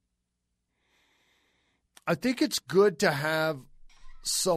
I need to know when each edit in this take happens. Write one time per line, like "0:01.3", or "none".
none